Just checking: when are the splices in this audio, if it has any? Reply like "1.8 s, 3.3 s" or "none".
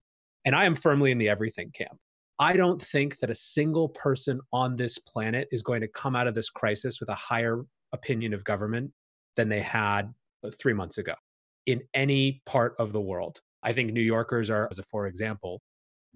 13.5 s, 14.7 s

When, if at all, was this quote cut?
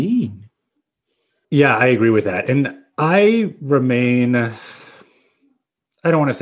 1.4 s

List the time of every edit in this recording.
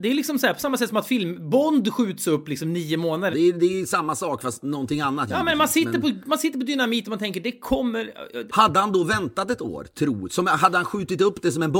3.3 s, 8.5 s

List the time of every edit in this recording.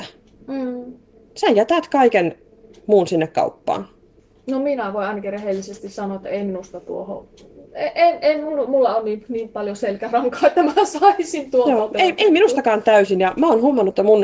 1.3 s

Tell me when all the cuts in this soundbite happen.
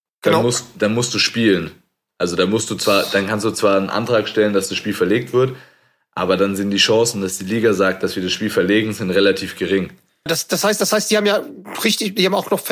10.3 s

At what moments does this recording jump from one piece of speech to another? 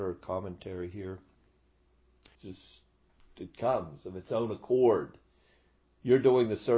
2.4 s

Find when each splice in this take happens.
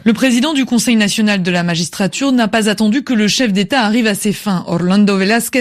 none

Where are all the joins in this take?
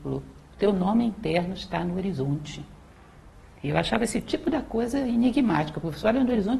none

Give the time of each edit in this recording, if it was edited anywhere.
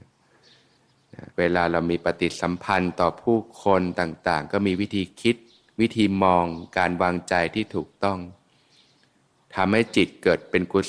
1.3 s

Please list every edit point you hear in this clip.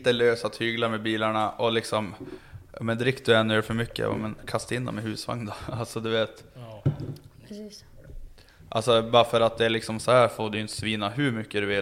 8.5 s

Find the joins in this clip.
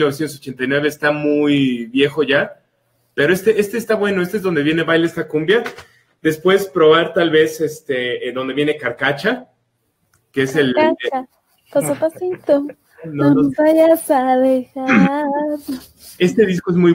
none

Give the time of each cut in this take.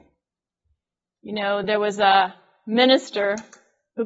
none

